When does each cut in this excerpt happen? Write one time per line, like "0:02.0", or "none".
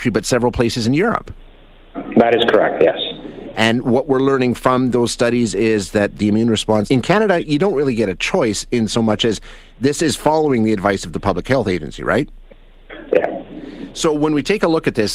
0:06.9
0:13.1